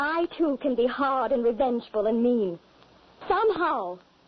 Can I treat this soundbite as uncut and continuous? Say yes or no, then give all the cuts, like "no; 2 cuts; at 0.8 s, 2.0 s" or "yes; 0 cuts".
no; 1 cut; at 3.2 s